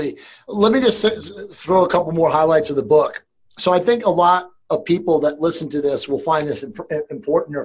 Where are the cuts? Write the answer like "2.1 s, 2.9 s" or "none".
none